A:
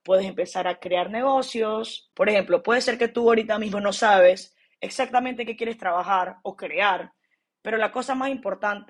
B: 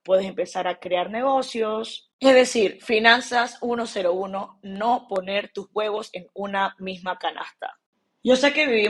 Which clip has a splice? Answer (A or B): A